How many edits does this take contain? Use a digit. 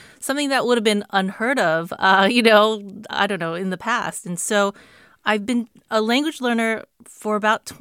0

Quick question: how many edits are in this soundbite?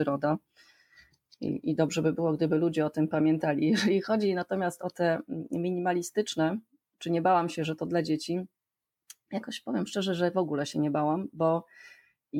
0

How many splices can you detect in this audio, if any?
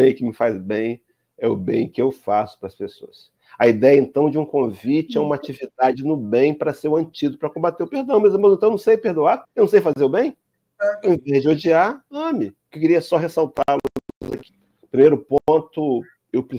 2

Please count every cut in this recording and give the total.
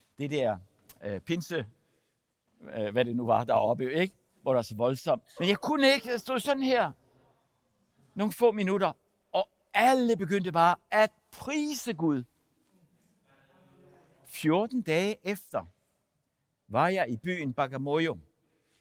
1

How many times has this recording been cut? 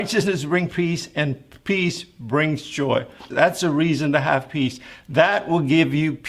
1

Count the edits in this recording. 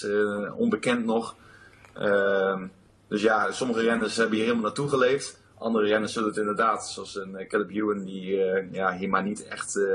0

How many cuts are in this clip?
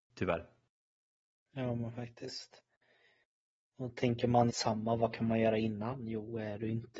1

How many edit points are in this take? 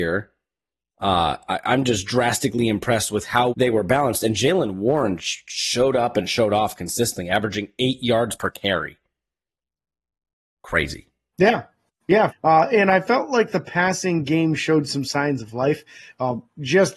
2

